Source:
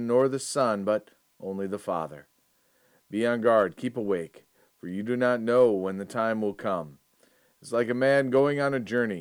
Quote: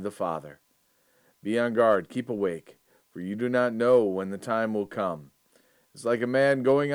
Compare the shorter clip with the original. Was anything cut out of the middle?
no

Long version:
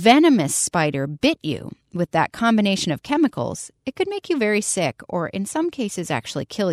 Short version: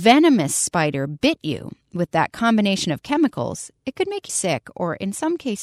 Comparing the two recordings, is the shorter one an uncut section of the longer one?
no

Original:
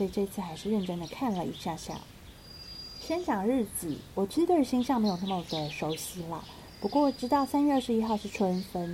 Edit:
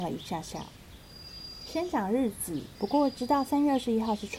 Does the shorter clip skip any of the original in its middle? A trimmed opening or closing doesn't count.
yes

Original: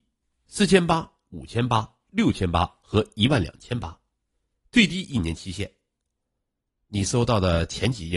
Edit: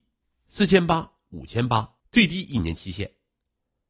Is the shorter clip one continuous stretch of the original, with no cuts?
no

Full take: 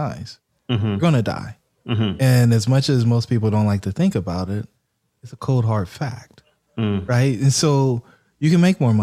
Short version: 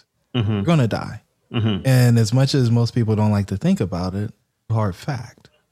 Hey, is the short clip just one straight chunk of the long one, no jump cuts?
no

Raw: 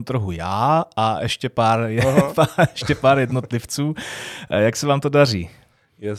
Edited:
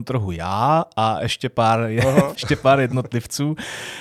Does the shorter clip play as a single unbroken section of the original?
no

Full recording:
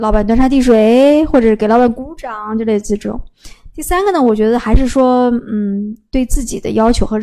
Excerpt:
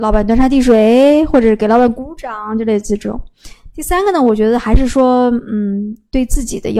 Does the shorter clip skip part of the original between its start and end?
no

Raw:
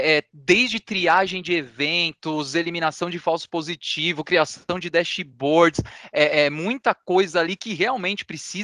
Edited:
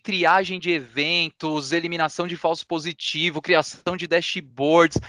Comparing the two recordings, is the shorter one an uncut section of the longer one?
yes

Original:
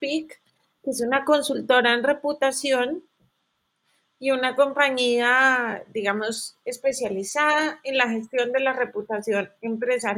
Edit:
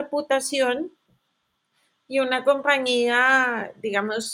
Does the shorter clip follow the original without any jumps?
yes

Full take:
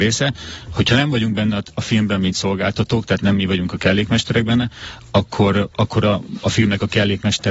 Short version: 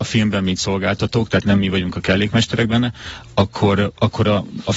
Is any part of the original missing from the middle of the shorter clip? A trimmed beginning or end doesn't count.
no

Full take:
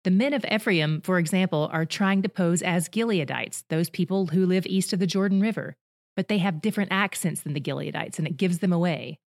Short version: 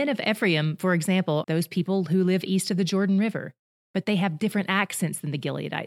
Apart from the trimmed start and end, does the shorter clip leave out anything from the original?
yes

